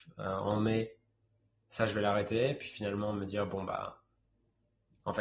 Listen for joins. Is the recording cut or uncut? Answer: uncut